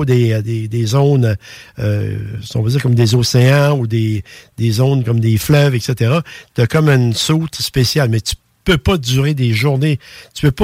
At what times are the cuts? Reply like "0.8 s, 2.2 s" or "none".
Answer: none